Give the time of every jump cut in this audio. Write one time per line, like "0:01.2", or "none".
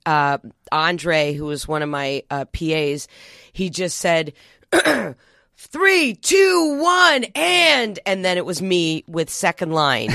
none